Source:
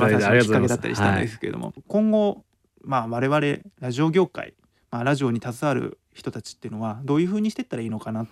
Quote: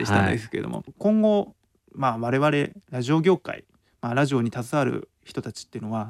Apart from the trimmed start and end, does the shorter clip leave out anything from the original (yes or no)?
no